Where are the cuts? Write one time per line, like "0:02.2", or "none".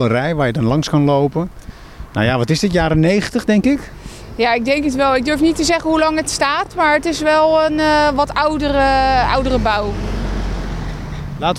none